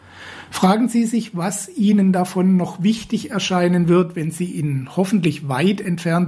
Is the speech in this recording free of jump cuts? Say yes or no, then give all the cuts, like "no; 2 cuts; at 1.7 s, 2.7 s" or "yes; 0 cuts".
yes; 0 cuts